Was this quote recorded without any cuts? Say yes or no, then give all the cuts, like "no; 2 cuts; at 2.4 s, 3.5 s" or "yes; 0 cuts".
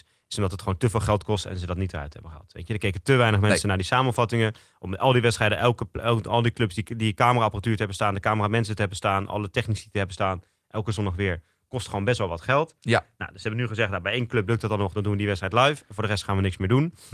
yes; 0 cuts